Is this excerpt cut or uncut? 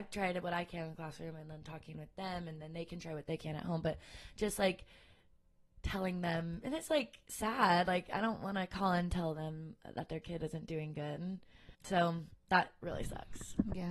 cut